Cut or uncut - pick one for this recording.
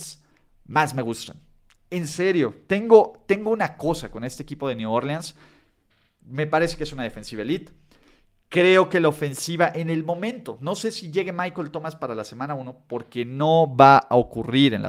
uncut